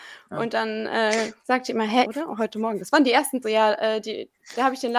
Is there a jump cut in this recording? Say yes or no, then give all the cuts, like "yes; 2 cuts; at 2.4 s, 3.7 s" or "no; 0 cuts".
yes; 2 cuts; at 2.0 s, 3.4 s